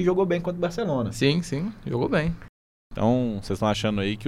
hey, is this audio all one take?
yes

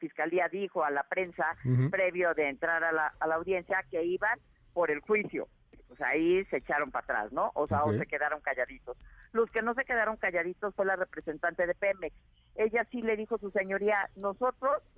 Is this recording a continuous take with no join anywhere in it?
no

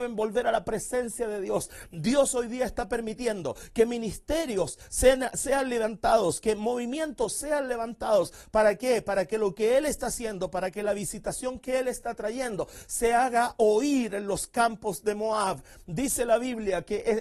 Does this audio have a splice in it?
no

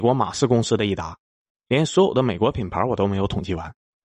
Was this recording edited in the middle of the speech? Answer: yes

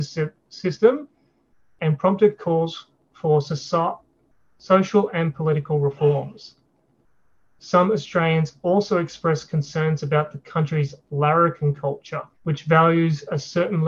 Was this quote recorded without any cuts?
no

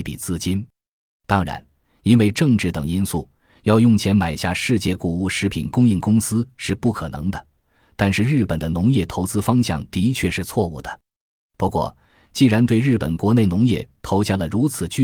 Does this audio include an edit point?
no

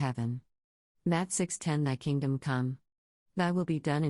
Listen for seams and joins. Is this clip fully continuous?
yes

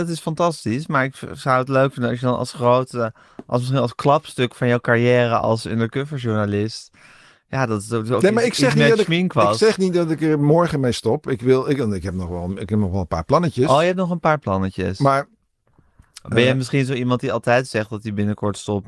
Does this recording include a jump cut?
no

